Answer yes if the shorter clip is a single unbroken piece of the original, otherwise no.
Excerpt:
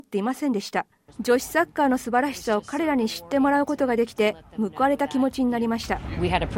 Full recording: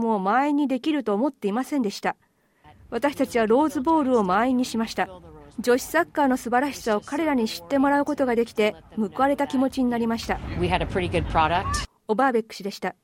no